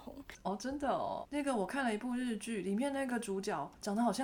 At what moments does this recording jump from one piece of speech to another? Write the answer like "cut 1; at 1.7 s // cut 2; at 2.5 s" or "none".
cut 1; at 1.2 s

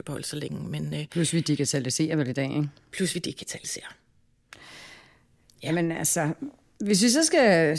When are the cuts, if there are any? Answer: none

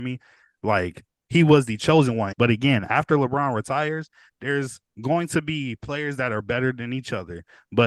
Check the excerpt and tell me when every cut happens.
cut 1; at 2.3 s // cut 2; at 4.9 s

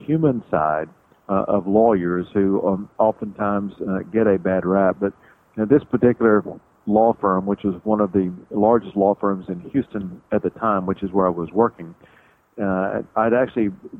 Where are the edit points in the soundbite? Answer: none

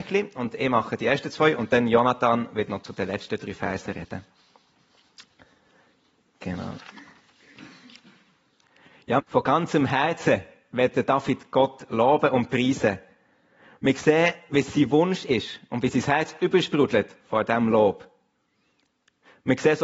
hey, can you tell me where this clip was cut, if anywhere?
cut 1; at 9.2 s

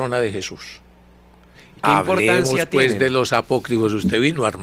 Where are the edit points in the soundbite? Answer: cut 1; at 1.5 s

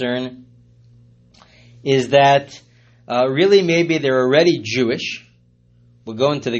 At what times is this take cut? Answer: none

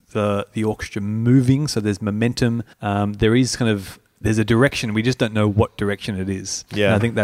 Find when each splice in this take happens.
cut 1; at 2.7 s

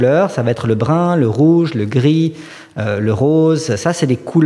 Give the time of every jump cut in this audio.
none

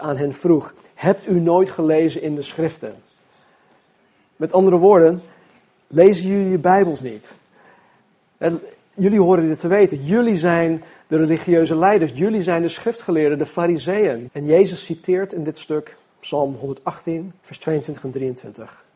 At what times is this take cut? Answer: cut 1; at 14.3 s // cut 2; at 17.4 s

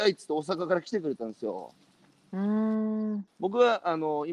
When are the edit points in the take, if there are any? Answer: cut 1; at 3.3 s

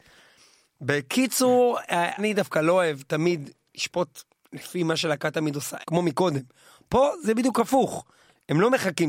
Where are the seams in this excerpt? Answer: cut 1; at 2.2 s // cut 2; at 5.8 s

